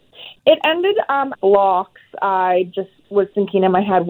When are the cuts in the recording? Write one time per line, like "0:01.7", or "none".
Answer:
0:01.3